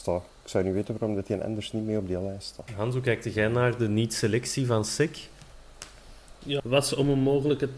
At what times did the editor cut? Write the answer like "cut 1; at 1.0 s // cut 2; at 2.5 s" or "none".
cut 1; at 2.7 s // cut 2; at 6.6 s